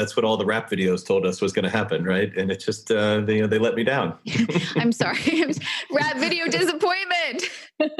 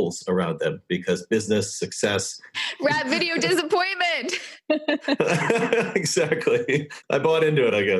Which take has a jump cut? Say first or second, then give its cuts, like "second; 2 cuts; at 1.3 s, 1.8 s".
second; 1 cut; at 2.5 s